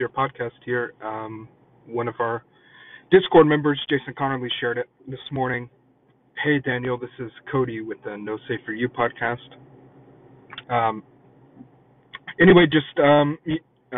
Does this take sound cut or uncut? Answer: cut